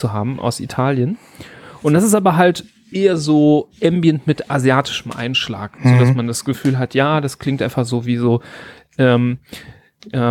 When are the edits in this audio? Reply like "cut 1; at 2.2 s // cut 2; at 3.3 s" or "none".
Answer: none